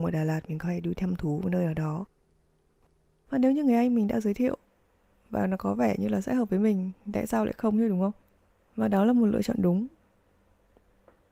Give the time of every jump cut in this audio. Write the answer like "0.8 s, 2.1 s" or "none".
none